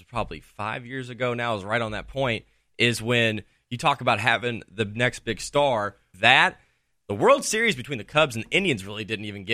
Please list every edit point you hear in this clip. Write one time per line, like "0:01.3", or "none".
0:06.1